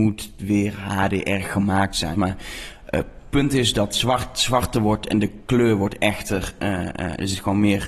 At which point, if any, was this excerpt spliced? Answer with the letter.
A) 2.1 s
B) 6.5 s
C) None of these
A